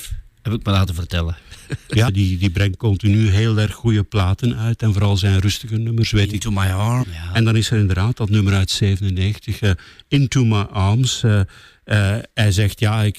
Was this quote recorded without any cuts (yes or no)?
no